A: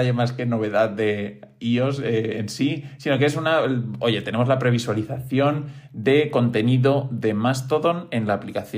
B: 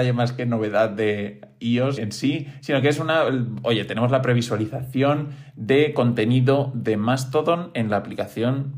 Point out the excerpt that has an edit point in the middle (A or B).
B